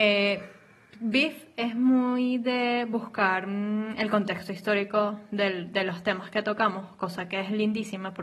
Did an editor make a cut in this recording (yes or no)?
no